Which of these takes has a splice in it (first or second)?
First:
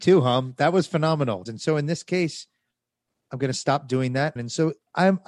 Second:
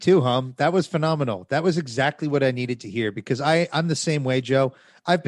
first